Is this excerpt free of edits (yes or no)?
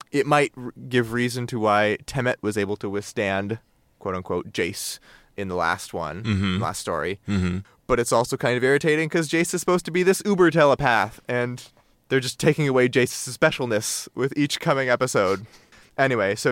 yes